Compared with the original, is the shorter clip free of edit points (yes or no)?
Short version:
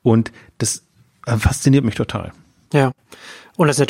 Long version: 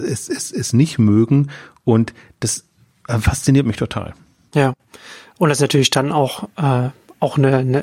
yes